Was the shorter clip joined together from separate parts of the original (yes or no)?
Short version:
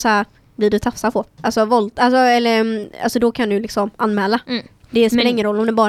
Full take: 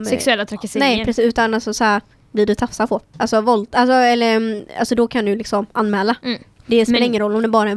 no